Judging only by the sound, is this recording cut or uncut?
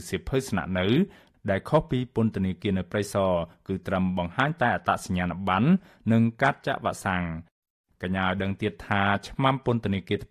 uncut